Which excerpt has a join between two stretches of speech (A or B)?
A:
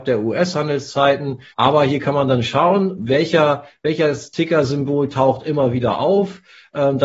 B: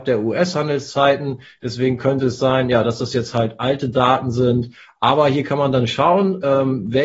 A